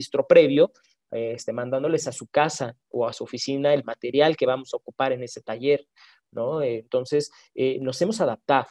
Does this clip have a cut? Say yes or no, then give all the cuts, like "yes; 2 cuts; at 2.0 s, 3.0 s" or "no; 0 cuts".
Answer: no; 0 cuts